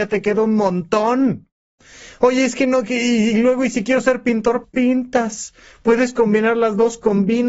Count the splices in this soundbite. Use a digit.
1